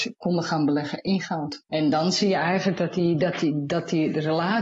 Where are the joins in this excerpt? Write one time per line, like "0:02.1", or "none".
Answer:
0:01.7